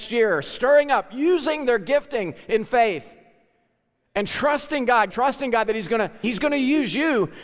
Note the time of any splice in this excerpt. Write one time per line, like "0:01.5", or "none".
0:05.1
0:06.2